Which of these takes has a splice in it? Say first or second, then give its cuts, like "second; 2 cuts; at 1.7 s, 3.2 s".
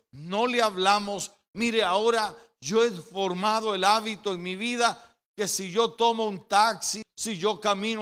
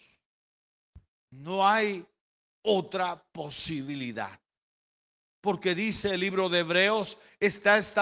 first; 1 cut; at 7.0 s